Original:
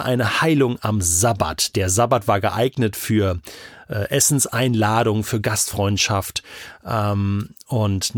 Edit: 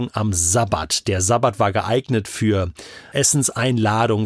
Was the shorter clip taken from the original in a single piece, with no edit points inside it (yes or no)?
no